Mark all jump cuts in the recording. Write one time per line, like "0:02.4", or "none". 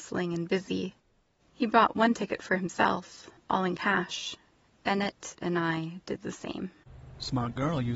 0:05.4